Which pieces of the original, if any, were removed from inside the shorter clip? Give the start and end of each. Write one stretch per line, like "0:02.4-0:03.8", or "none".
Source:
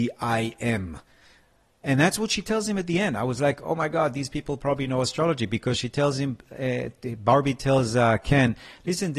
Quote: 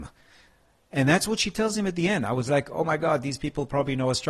none